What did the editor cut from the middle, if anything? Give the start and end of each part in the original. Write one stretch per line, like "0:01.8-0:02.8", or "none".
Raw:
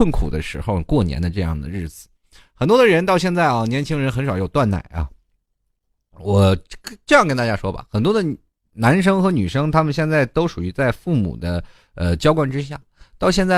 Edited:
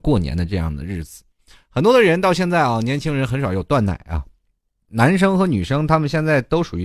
0:05.7-0:08.7